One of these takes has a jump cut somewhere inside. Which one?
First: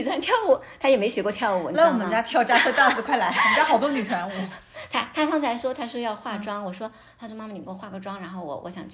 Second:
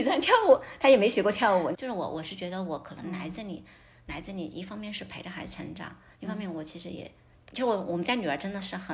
second; 1 cut; at 1.7 s

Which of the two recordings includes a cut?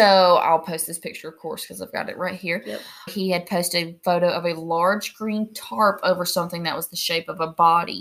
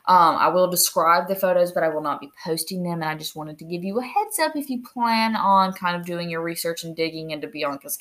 first; 1 cut; at 3.1 s

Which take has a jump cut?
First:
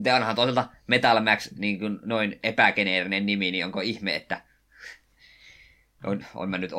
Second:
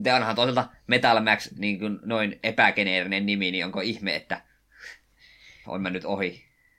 second; 1 cut; at 5.6 s

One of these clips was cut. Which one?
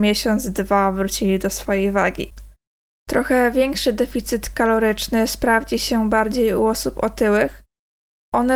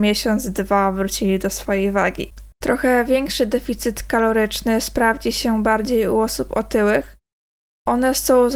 second; 1 cut; at 2.5 s

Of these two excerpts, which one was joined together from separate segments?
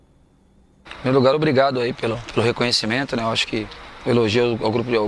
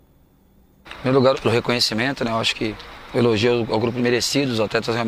second; 2 cuts; at 1.3 s, 4.0 s

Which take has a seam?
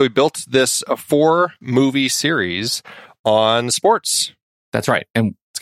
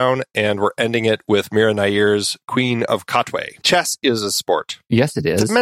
second; 1 cut; at 3.6 s

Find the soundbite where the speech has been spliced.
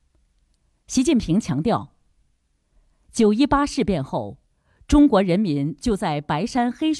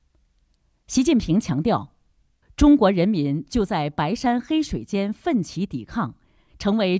second; 1 cut; at 2.4 s

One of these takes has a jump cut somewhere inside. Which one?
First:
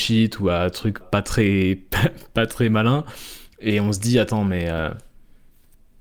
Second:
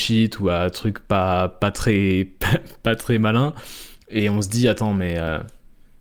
first; 1 cut; at 1.0 s

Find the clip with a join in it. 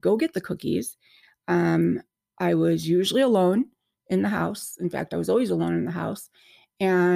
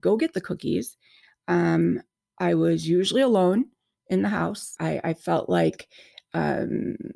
second; 1 cut; at 4.8 s

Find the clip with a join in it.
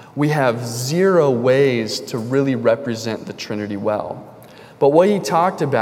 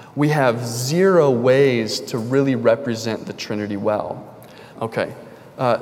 second; 1 cut; at 4.8 s

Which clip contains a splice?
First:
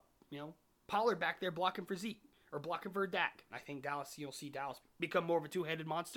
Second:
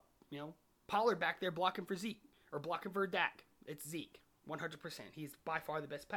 first; 2 cuts; at 3.5 s, 4.8 s

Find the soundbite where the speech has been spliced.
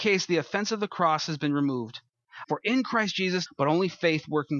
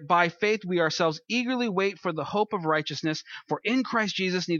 first; 2 cuts; at 2.4 s, 3.5 s

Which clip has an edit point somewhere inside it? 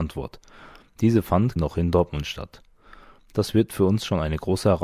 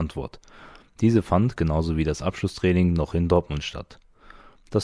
first; 1 cut; at 1.6 s

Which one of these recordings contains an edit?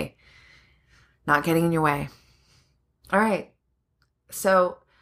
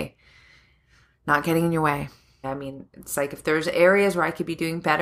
second; 1 cut; at 2.4 s

